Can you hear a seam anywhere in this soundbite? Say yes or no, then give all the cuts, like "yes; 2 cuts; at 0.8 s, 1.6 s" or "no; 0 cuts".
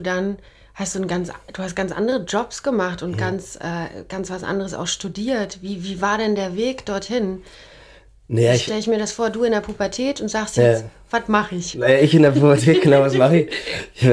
no; 0 cuts